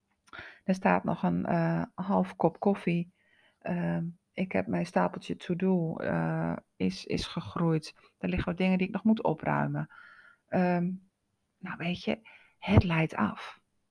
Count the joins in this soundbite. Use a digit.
0